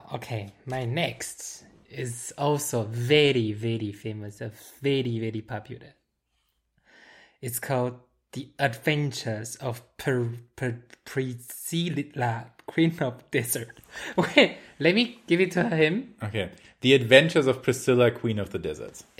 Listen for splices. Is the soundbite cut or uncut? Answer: uncut